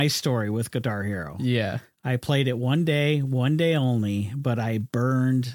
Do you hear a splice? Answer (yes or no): no